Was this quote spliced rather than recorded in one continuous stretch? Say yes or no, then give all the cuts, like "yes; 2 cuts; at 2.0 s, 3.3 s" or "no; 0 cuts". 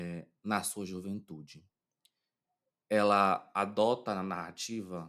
no; 0 cuts